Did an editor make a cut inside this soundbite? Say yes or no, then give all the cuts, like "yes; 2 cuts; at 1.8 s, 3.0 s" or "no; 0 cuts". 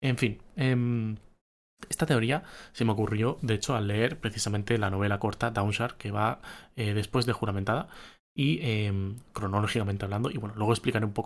no; 0 cuts